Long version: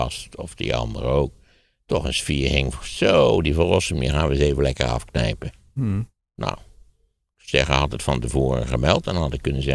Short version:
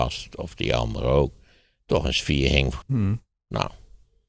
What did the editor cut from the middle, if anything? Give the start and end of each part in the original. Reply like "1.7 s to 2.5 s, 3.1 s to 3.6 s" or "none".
2.8 s to 5.7 s